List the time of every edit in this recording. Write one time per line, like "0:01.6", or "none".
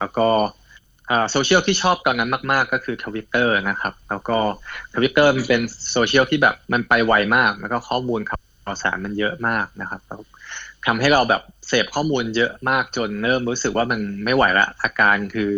0:06.6